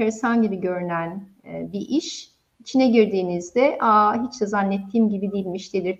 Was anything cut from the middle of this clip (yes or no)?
no